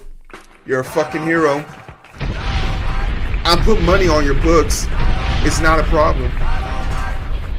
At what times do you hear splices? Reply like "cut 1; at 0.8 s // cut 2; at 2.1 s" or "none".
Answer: none